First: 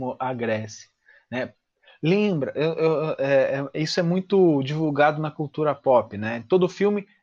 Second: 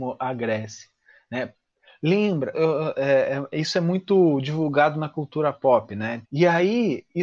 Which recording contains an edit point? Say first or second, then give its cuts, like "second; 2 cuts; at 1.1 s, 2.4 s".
second; 2 cuts; at 2.5 s, 6.2 s